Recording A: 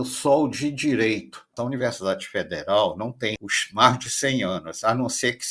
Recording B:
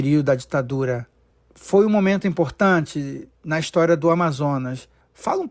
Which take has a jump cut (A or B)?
A